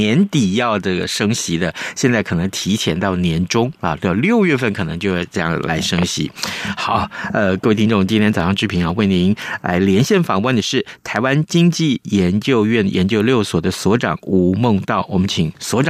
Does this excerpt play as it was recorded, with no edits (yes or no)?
yes